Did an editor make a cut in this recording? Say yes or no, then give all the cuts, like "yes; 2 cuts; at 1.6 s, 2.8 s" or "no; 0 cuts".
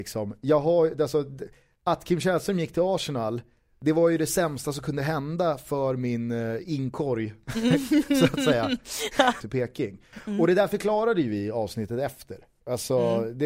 yes; 1 cut; at 9.4 s